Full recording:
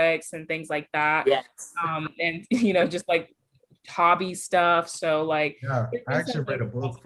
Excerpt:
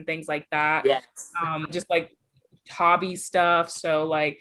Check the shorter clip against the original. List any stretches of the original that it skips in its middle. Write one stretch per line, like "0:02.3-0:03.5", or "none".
0:02.1-0:02.9